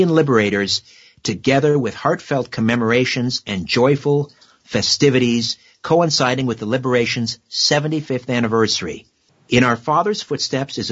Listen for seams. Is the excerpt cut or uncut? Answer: cut